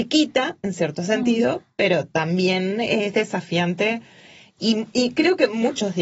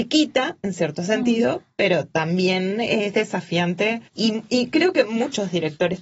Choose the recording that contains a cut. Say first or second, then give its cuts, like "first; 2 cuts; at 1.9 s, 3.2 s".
second; 1 cut; at 4.1 s